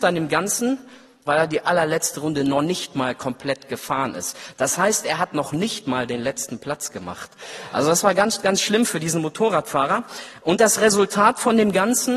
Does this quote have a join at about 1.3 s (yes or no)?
yes